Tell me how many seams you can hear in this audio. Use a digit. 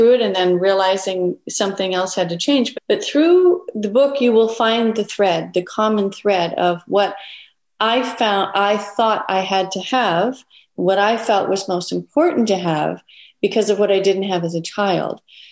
1